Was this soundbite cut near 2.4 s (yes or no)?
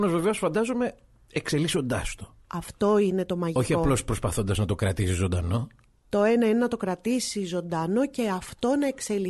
yes